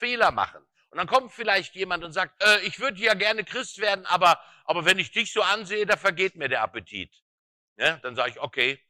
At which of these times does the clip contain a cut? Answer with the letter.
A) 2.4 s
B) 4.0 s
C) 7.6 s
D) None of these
A